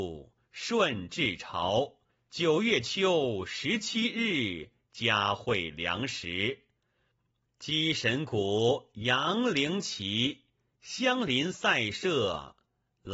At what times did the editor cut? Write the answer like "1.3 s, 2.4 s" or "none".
2.1 s